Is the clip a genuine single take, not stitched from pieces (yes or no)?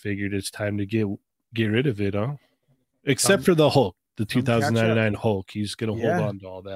yes